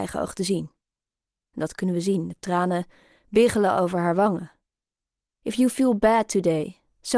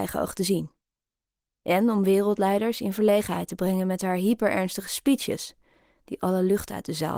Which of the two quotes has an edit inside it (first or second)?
first